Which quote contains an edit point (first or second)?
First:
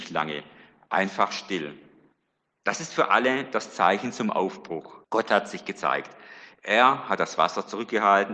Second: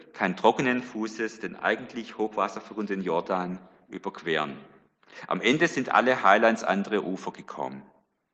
first